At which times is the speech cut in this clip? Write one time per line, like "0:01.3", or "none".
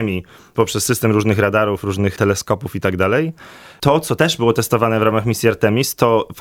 none